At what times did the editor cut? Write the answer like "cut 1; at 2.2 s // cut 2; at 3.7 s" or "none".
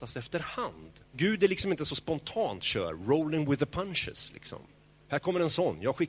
cut 1; at 1.0 s